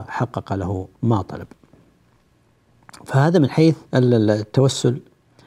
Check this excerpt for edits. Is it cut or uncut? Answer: cut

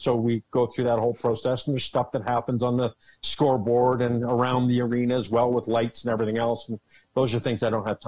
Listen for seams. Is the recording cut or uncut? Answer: uncut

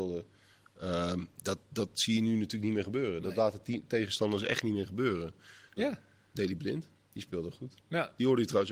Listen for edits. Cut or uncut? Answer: cut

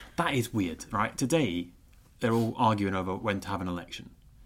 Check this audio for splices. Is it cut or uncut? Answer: uncut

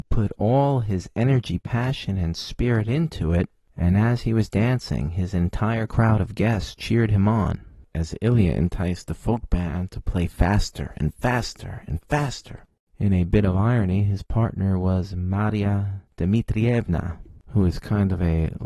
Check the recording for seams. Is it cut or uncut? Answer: uncut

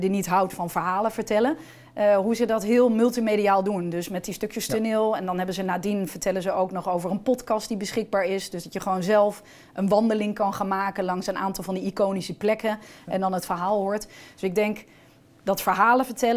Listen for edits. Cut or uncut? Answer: uncut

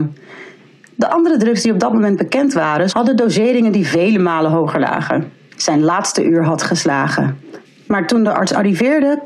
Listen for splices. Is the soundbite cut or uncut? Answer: cut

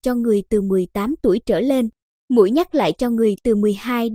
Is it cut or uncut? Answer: uncut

